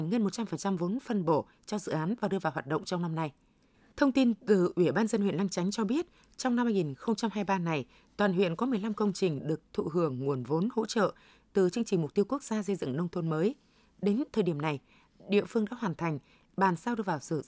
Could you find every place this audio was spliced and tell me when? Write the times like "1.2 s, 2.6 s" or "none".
3.9 s